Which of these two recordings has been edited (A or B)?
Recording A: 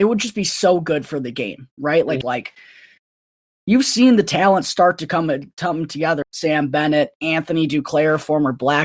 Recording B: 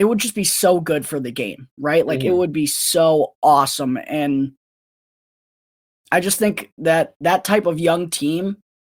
A